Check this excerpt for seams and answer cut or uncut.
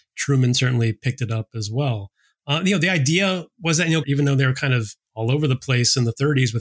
cut